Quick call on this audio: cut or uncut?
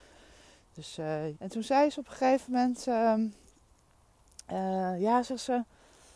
cut